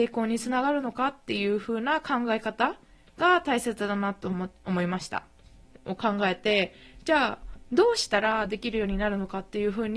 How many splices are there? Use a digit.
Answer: 1